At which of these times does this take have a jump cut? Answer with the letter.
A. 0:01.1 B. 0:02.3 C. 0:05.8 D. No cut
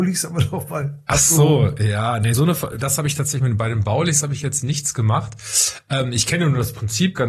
D